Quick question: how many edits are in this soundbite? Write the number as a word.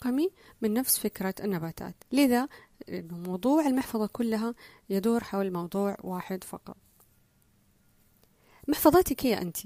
one